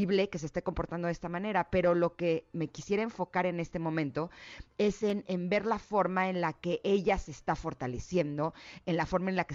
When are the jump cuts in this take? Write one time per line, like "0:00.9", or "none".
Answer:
0:02.5